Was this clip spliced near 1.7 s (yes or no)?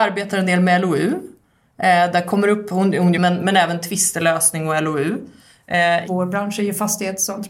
no